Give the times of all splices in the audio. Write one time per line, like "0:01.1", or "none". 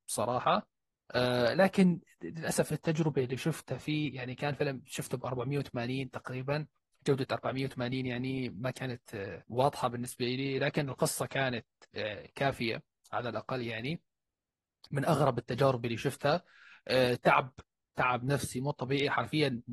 0:09.4